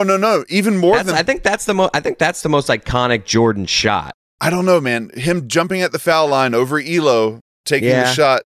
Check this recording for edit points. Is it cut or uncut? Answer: uncut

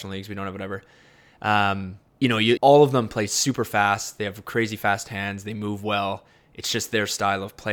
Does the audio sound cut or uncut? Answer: cut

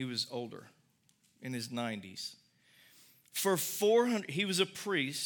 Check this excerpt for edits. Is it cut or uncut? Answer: uncut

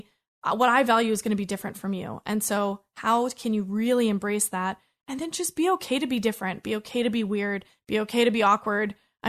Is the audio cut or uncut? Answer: uncut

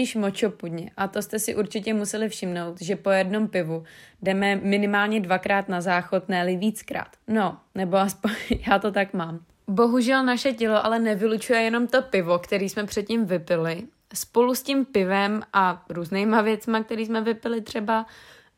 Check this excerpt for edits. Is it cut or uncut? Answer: cut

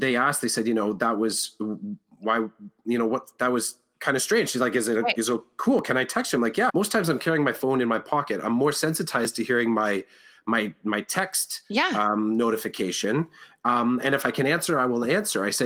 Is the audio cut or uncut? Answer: cut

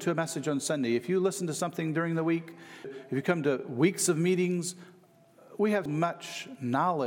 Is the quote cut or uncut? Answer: cut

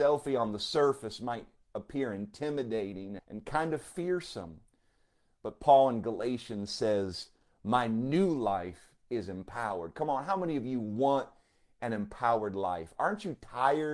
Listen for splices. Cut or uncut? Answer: cut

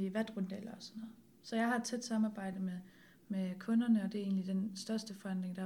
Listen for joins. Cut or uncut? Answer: uncut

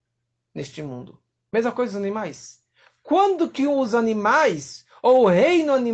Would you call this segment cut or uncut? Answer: uncut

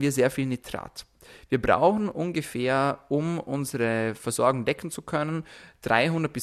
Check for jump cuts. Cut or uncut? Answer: uncut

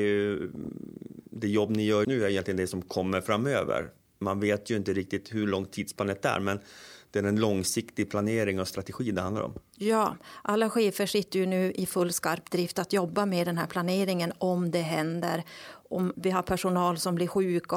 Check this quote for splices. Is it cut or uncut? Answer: cut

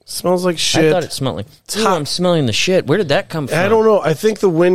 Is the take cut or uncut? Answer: uncut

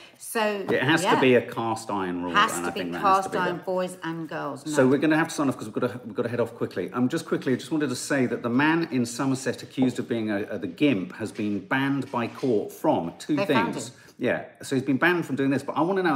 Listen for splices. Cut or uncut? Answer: uncut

